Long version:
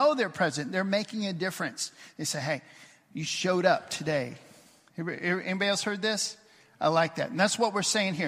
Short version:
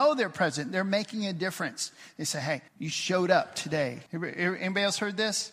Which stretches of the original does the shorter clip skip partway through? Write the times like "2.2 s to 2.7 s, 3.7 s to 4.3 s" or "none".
2.7 s to 3.0 s, 4.4 s to 4.9 s